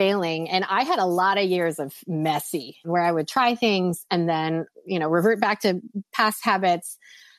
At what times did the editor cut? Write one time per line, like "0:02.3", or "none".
0:02.8